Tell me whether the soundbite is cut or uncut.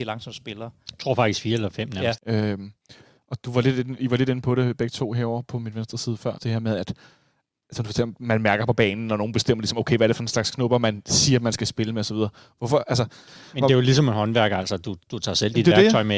cut